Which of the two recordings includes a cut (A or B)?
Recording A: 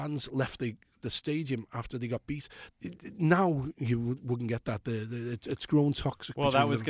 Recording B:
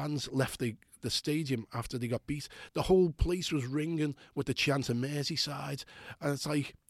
A